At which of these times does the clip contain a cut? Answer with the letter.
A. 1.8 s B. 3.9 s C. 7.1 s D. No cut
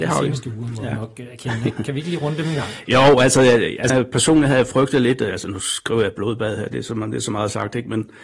B